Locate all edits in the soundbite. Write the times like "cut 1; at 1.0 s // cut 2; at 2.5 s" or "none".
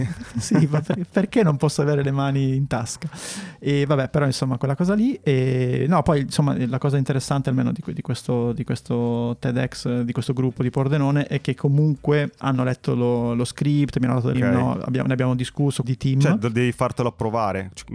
cut 1; at 14.3 s // cut 2; at 15.8 s